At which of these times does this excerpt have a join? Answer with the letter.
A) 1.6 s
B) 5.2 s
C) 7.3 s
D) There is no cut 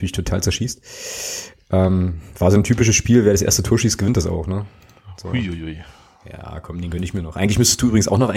D